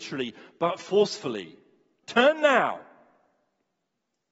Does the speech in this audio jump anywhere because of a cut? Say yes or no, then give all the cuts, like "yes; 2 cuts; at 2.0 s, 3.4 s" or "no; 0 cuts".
yes; 1 cut; at 2.0 s